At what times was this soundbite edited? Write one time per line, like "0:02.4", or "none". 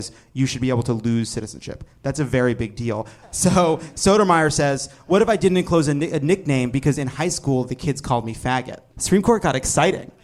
0:03.2
0:08.9